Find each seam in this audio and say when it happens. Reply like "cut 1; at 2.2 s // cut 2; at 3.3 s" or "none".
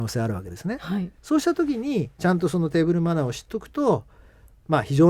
none